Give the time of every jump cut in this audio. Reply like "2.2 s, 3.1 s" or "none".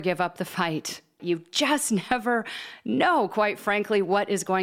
1.2 s